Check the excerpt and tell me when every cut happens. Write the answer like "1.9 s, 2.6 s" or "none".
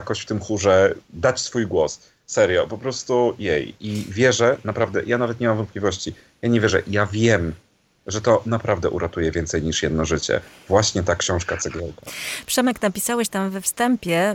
none